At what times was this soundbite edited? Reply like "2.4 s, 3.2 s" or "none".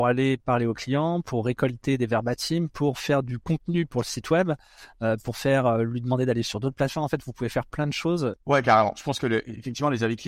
8.4 s

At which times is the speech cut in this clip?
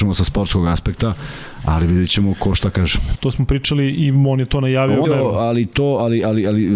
3.2 s, 5.0 s

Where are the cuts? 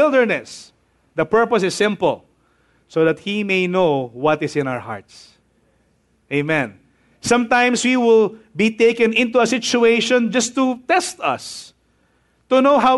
none

